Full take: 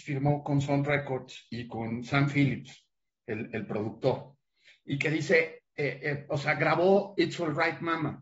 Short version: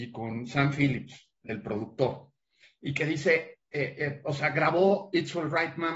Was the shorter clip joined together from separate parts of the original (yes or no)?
yes